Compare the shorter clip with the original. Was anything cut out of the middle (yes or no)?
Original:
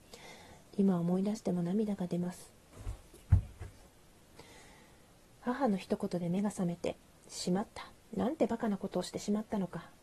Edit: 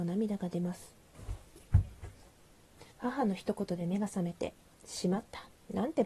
yes